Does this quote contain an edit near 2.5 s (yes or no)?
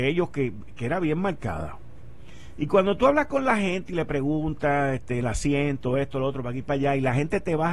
no